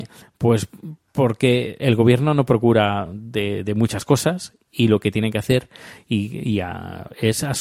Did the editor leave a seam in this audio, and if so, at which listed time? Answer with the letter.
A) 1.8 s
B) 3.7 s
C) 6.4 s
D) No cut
A